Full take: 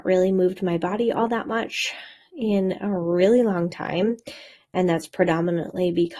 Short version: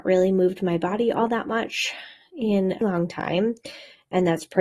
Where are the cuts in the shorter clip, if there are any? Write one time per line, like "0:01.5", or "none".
0:02.8